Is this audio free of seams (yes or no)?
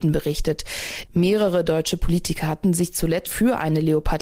no